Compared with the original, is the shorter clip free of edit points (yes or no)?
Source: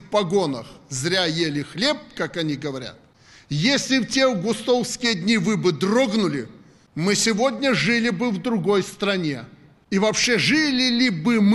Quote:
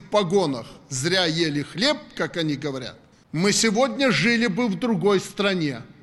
no